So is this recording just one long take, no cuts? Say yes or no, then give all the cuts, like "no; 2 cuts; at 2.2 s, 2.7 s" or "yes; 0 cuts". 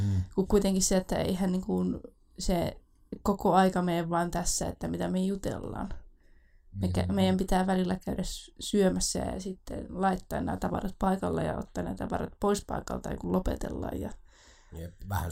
yes; 0 cuts